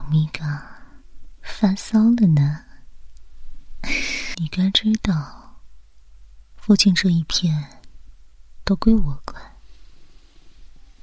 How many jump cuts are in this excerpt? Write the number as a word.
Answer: one